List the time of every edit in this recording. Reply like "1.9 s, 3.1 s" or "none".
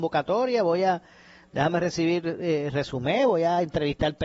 none